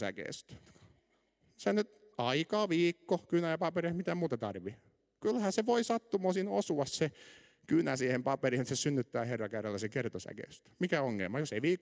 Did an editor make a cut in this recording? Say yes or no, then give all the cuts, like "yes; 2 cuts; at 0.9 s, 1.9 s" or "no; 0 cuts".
no; 0 cuts